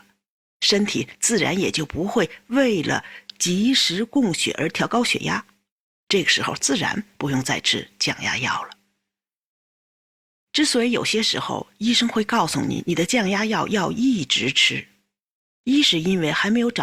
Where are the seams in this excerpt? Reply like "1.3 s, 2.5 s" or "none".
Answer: none

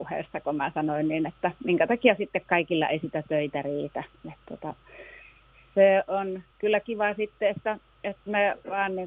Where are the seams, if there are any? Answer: 6.5 s

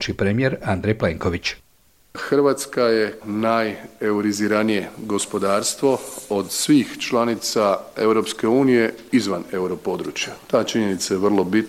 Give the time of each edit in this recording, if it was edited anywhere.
3.2 s

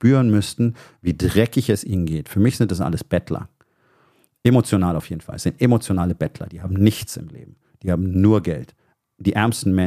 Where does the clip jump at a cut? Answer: none

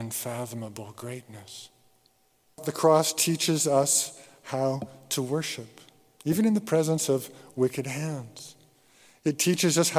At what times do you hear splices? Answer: none

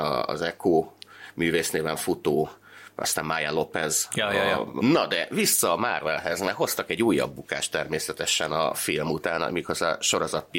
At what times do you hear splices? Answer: 4.8 s

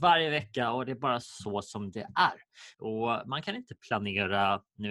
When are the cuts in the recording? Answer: 2.7 s

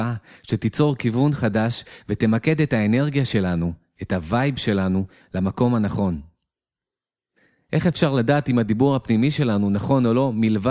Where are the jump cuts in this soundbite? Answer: none

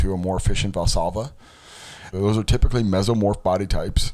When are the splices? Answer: 2.1 s

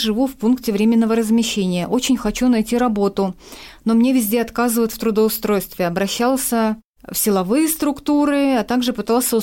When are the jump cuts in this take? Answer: none

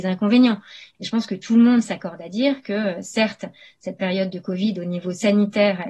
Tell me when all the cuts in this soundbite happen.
0.9 s

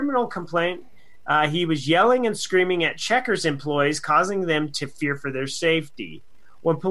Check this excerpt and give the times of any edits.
none

